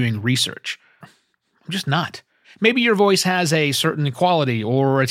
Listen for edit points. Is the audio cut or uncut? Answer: cut